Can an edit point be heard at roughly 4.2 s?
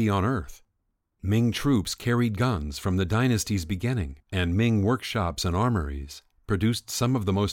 yes; 2 cuts; at 1.1 s, 4.2 s

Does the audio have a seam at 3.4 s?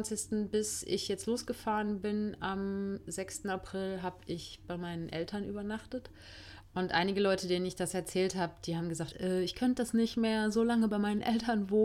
no; 2 cuts; at 6.6 s, 9.1 s

